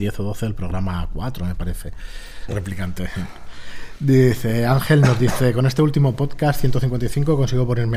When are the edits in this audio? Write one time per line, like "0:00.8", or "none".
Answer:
0:02.5